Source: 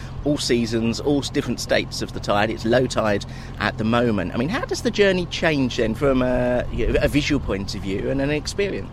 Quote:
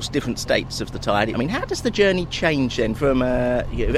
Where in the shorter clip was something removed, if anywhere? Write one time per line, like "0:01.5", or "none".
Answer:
0:01.3

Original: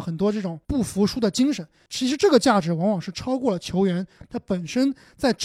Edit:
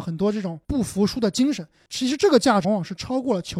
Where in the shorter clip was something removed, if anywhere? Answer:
0:02.6

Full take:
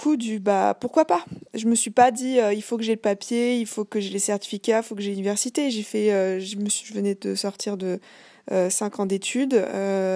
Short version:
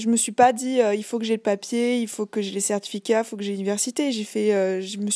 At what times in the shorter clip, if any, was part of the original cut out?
none

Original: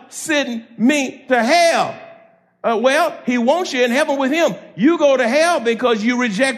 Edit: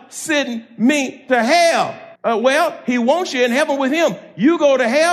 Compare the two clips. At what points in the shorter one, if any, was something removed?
0:02.2

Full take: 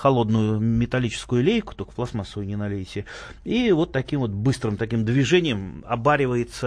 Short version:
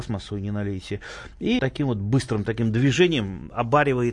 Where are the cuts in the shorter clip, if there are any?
0:01.6

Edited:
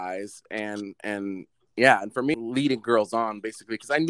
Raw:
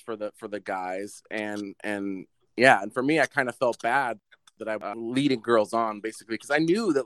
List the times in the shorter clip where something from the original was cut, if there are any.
0:02.3

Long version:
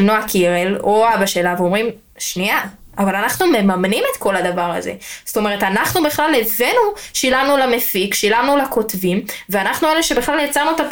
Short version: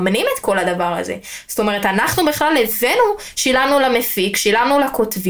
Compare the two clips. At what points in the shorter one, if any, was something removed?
none

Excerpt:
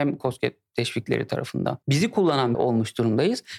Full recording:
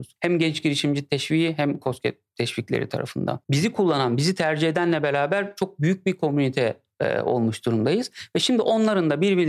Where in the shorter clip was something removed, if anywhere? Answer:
0:02.5

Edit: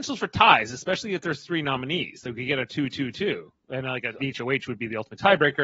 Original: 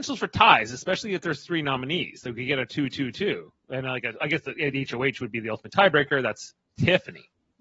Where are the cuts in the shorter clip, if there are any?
0:04.2

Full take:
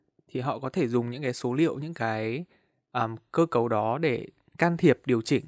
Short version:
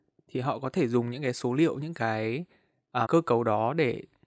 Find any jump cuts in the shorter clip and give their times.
0:03.1

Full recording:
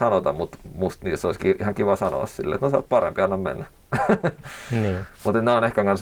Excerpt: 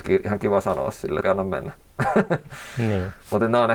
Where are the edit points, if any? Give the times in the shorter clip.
0:01.2

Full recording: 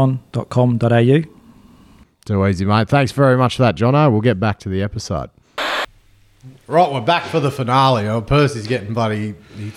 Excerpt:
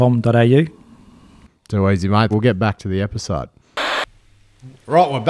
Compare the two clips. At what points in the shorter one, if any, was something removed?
0:02.3

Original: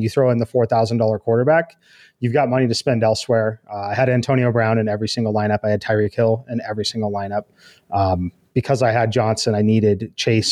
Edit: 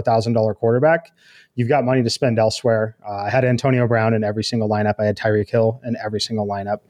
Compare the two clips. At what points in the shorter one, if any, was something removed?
none

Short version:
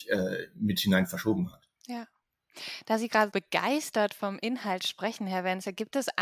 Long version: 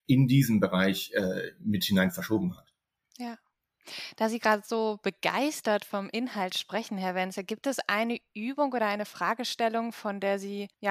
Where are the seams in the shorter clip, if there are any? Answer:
0:01.8
0:03.3

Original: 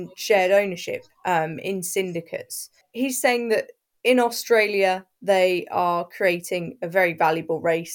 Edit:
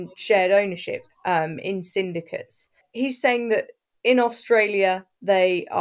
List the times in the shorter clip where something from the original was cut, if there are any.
none

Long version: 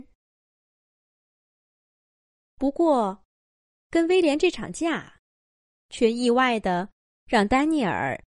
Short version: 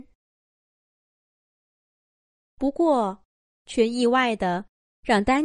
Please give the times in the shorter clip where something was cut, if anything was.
0:03.6

